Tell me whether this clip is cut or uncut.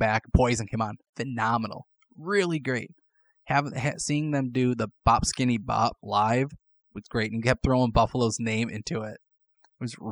uncut